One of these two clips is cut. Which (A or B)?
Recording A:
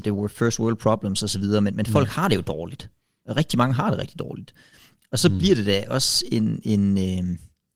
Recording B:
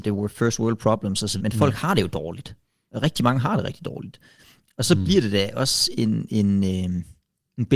B